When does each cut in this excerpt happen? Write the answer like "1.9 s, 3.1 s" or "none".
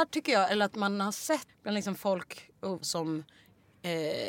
1.5 s, 2.8 s